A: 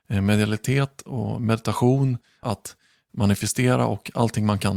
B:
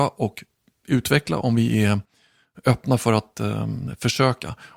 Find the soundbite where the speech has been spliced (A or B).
A